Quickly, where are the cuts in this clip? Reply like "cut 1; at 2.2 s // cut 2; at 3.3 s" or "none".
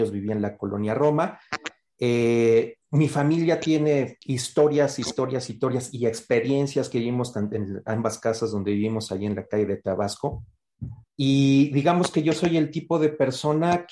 cut 1; at 4.2 s // cut 2; at 11.0 s